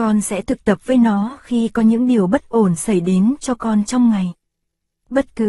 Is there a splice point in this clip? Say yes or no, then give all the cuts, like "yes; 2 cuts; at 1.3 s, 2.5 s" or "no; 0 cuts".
no; 0 cuts